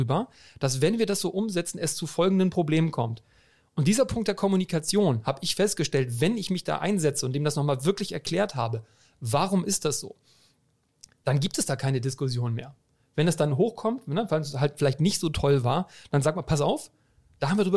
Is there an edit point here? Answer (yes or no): no